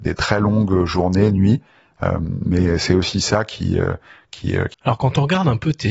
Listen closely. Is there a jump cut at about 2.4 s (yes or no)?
no